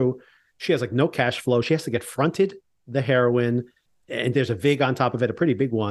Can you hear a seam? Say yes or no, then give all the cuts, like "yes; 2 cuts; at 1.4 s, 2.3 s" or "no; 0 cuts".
no; 0 cuts